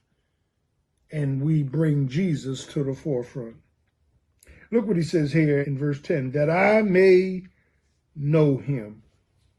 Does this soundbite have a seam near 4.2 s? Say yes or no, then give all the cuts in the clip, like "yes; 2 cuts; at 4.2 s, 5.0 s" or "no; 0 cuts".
no; 1 cut; at 5.6 s